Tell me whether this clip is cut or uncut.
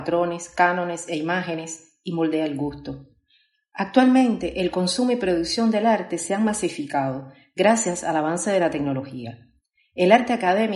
uncut